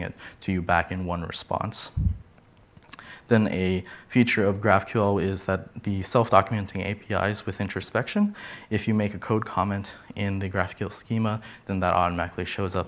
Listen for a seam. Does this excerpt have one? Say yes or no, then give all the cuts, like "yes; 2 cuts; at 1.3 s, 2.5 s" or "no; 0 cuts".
no; 0 cuts